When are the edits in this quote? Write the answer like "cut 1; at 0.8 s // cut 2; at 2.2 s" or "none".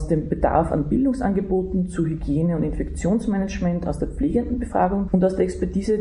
cut 1; at 5.1 s